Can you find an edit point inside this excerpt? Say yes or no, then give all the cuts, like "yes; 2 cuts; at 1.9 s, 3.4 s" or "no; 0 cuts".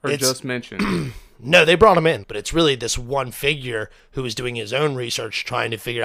yes; 1 cut; at 2.2 s